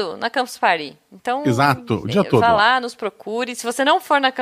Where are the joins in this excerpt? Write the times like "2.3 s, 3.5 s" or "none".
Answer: none

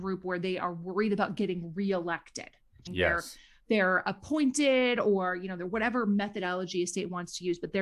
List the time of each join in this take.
2.9 s

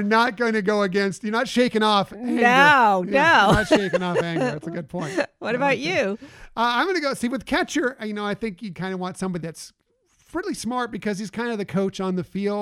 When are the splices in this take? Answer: none

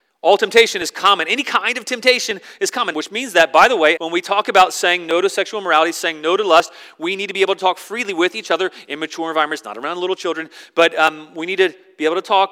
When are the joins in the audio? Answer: 2.9 s, 4.0 s

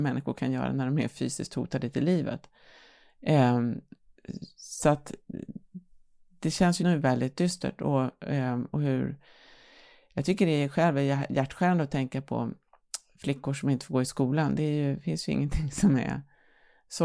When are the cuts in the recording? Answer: 6.8 s

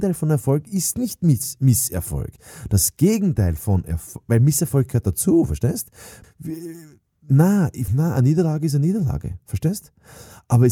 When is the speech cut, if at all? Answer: 6.2 s, 7.9 s

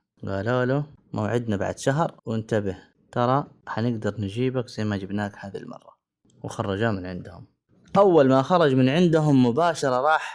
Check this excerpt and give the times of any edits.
2.2 s

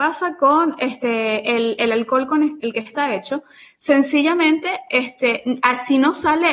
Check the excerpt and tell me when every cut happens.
2.6 s

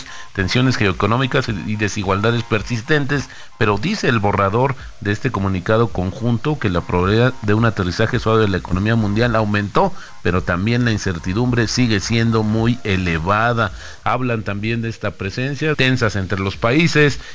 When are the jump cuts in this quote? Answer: 14.0 s, 15.7 s

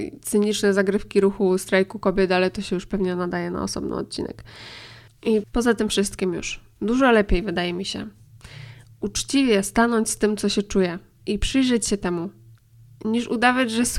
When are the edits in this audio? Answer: none

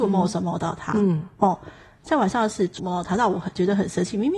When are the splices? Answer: 2.8 s

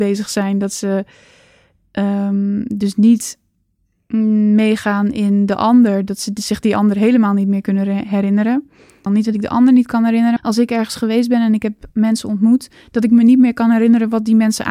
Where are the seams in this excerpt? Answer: 9.1 s, 10.4 s

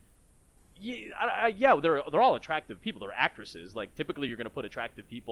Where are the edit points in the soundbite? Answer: none

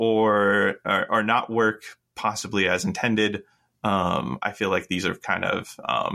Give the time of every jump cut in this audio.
none

